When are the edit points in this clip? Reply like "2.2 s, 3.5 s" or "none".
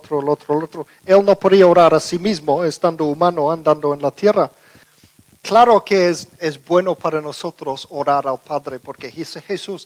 6.4 s